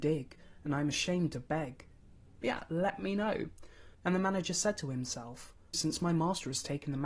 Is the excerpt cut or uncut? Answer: cut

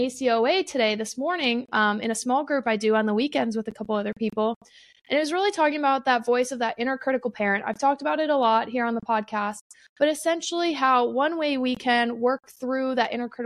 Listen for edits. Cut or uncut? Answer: uncut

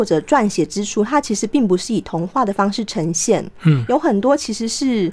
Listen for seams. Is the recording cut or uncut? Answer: uncut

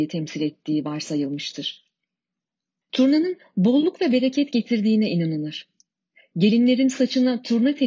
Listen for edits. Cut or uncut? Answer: cut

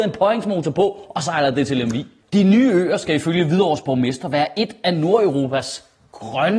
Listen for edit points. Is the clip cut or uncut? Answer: uncut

